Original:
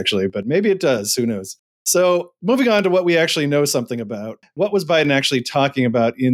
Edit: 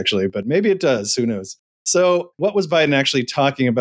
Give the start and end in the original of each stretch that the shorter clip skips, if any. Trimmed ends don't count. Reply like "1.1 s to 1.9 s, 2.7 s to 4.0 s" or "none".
2.3 s to 4.5 s